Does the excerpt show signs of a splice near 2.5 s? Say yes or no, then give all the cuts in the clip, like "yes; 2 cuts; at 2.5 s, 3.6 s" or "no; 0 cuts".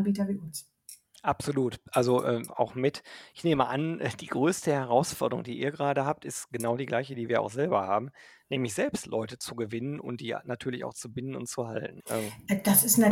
yes; 2 cuts; at 2.5 s, 12.0 s